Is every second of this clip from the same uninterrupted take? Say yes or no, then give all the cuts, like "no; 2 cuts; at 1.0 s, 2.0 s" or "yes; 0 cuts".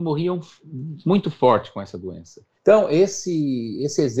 no; 1 cut; at 2.5 s